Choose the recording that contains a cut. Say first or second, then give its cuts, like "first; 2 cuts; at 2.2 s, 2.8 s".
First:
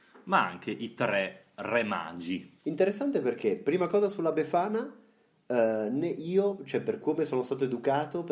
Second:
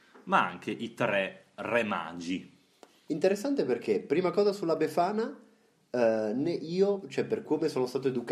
first; 1 cut; at 2.6 s